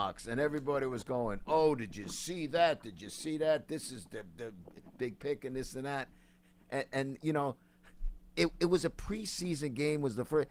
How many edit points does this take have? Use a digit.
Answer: 0